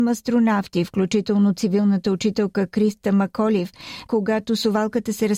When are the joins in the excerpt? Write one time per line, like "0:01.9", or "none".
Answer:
0:04.1